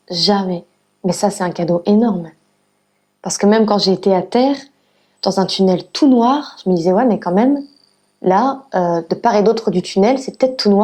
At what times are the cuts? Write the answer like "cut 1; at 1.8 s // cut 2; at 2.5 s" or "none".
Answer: none